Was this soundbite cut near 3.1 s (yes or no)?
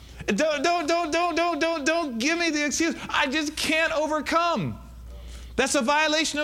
no